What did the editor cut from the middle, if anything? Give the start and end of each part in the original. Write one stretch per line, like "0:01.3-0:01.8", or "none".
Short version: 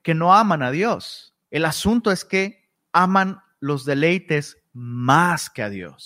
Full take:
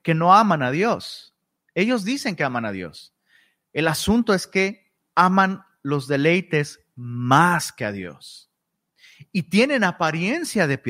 0:01.4-0:03.7